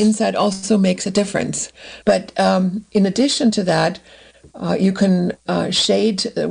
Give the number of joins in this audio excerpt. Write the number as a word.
one